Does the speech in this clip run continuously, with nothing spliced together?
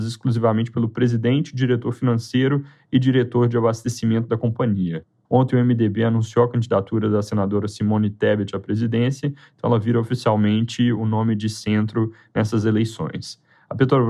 no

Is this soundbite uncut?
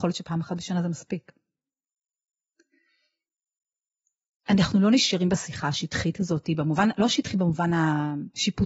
yes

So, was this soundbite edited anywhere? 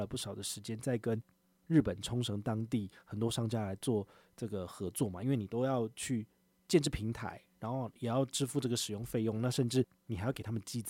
no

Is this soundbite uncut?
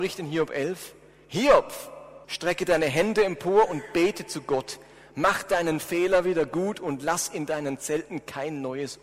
no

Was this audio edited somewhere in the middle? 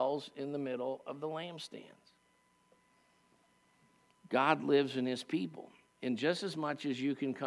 no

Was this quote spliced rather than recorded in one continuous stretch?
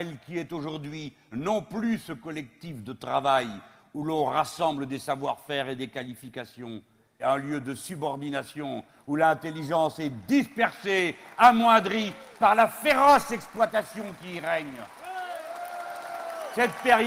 yes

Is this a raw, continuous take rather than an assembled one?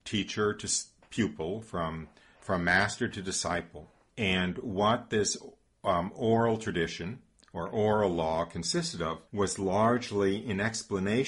no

